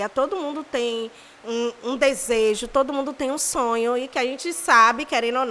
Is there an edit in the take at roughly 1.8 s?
yes; 1 cut; at 1.8 s

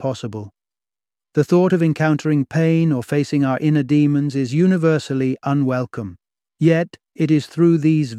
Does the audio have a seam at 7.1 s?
yes; 1 cut; at 7.1 s

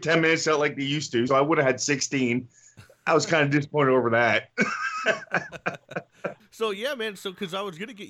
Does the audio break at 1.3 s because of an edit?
yes; 2 cuts; at 1.3 s, 6.4 s

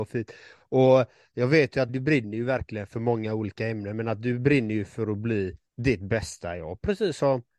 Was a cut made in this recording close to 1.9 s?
yes; 2 cuts; at 1.9 s, 5.7 s

